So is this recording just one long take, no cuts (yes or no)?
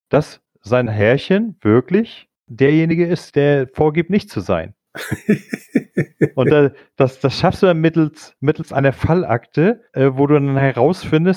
no